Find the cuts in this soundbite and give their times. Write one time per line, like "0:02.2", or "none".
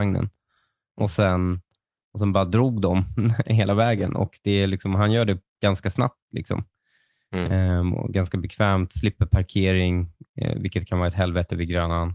none